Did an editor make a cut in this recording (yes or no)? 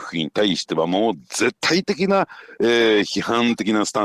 yes